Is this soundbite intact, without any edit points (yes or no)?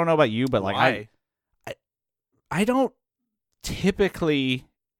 yes